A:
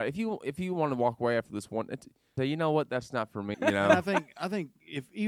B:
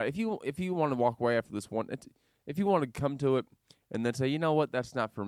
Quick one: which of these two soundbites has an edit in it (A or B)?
A